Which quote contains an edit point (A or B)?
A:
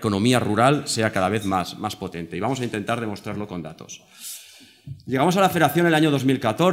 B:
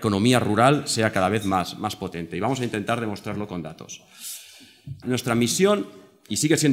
B